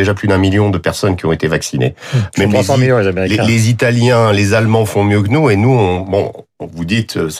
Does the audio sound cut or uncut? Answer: cut